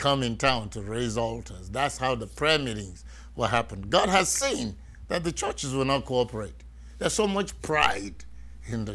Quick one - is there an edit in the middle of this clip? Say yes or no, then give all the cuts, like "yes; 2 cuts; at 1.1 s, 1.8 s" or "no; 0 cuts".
no; 0 cuts